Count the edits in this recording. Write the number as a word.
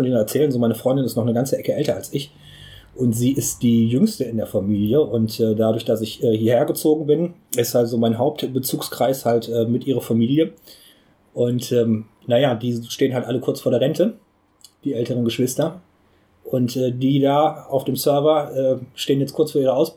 zero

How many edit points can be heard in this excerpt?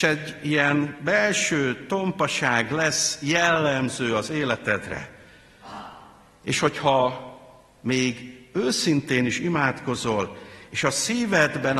zero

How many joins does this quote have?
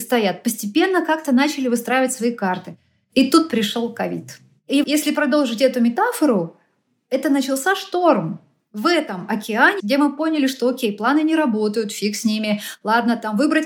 two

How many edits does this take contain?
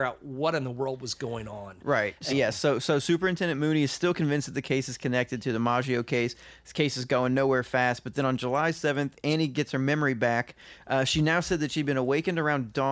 one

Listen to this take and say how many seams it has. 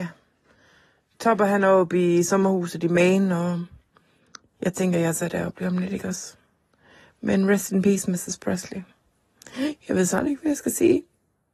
zero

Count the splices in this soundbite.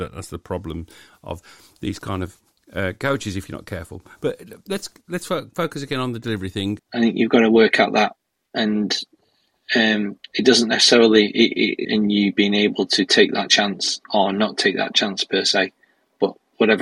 two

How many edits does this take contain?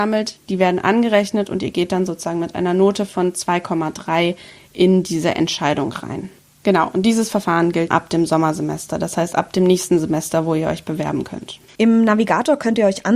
two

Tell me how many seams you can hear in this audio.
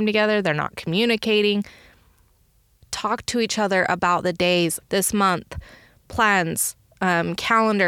two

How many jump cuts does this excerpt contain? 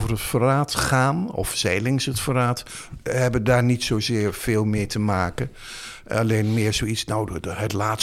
zero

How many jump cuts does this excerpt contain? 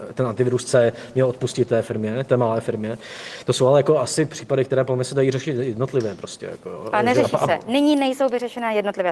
zero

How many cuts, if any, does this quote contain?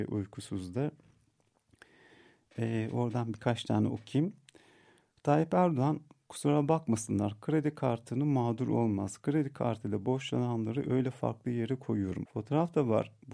one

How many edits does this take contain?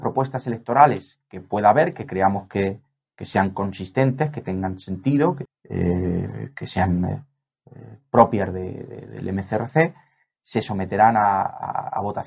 one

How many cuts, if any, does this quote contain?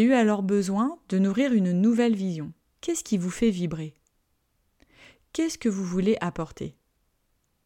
one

